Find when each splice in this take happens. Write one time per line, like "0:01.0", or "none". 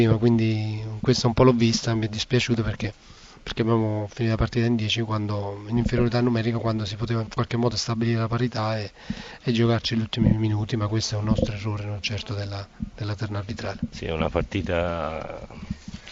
none

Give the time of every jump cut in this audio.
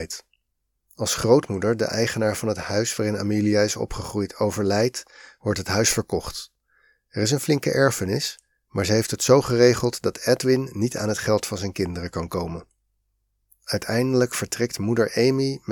none

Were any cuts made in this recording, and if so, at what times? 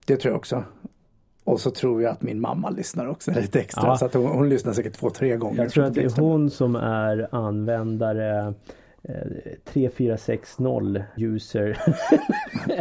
0:11.2

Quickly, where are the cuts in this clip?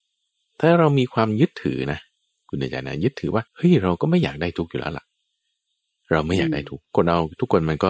0:03.5

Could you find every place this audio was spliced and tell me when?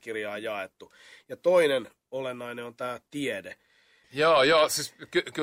0:04.0

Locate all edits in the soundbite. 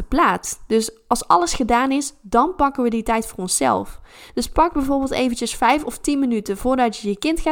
0:04.3

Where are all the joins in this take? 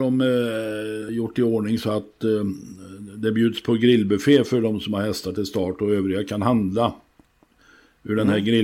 none

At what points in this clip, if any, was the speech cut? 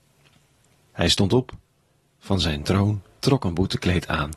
0:00.9
0:03.2

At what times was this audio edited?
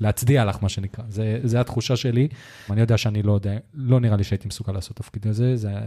0:01.4
0:02.7

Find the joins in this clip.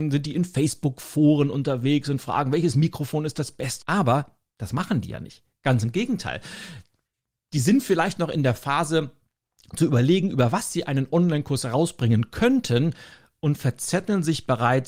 0:03.8

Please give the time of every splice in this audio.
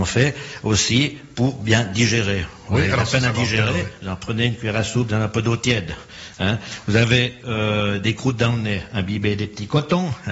none

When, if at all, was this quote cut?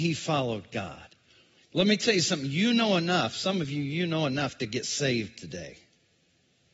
0:01.6

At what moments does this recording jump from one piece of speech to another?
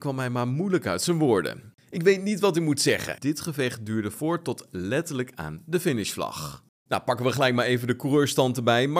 0:03.2
0:06.9

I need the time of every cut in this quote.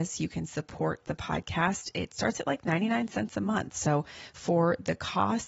none

